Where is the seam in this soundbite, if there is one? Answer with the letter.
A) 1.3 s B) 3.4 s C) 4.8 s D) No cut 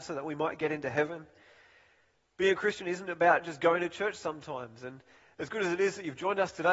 D